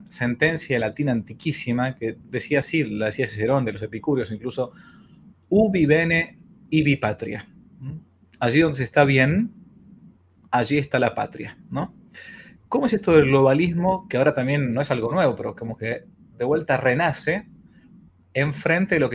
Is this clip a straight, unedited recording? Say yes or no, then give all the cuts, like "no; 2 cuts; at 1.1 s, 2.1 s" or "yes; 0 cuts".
yes; 0 cuts